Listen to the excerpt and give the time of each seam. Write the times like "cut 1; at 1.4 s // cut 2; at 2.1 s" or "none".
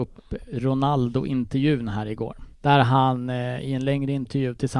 cut 1; at 2.5 s

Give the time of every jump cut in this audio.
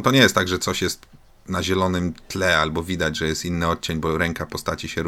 none

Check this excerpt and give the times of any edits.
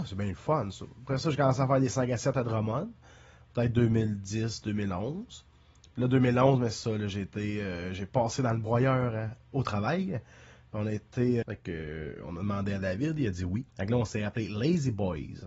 cut 1; at 11.4 s // cut 2; at 13.7 s

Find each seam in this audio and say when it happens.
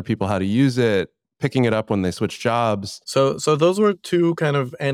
cut 1; at 3.0 s

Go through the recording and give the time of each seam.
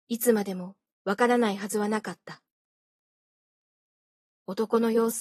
none

